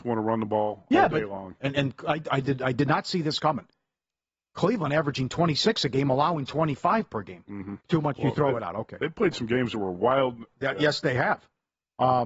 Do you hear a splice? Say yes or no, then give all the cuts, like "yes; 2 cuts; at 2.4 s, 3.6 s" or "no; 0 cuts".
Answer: yes; 3 cuts; at 1.6 s, 7.8 s, 10.5 s